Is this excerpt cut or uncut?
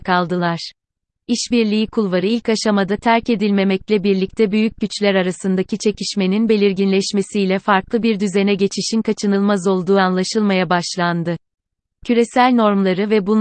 cut